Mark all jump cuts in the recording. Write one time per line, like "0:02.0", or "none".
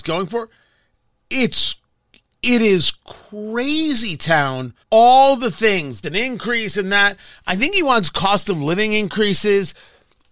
0:04.8
0:06.0